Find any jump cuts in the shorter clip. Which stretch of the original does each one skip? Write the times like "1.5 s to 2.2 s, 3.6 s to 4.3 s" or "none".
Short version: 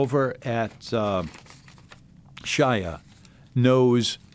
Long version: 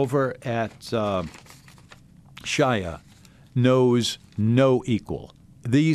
none